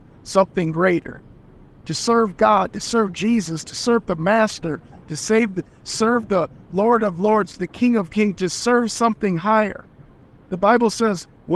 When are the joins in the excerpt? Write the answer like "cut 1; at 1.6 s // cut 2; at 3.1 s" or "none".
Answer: none